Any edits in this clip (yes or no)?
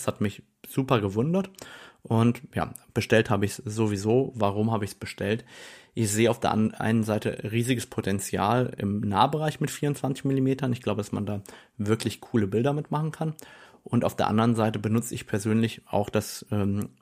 no